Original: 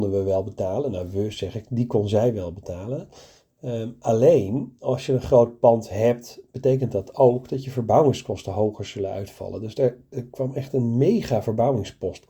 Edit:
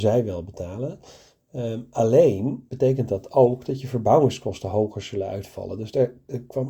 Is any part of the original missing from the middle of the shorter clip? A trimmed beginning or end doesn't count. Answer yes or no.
yes